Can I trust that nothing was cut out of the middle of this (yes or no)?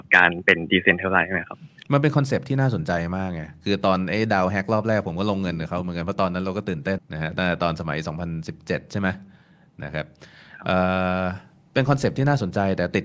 no